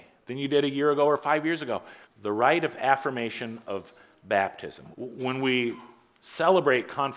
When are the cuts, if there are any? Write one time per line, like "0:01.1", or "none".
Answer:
0:02.0
0:04.9